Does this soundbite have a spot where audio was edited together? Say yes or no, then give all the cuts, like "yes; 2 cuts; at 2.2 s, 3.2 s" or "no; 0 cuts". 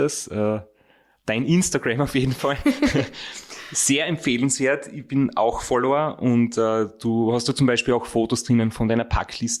no; 0 cuts